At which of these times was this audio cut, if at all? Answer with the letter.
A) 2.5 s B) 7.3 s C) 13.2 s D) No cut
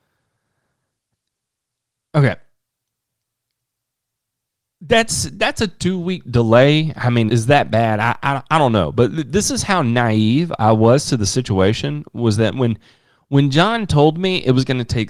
B